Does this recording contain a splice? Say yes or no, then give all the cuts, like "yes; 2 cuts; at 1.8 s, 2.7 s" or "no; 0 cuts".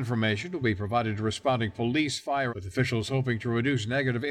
yes; 1 cut; at 2.5 s